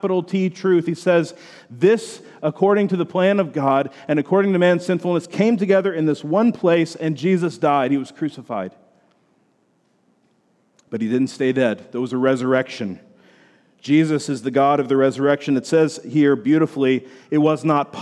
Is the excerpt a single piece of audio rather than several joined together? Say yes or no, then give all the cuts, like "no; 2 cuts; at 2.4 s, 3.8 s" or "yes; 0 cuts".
yes; 0 cuts